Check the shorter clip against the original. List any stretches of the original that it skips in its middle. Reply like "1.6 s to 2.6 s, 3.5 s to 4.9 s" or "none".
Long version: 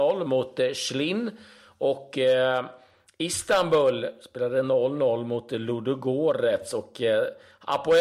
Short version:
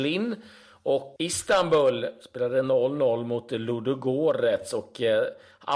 2.1 s to 3.2 s